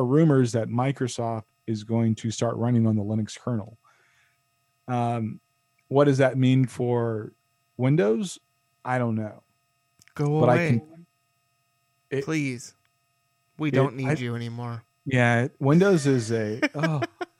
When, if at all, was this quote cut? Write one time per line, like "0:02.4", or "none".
none